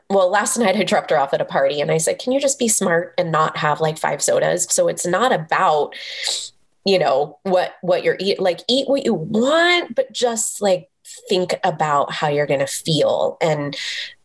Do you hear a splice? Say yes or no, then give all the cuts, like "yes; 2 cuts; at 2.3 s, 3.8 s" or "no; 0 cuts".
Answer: yes; 1 cut; at 4.7 s